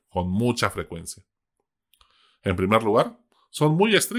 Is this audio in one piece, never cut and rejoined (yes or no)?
yes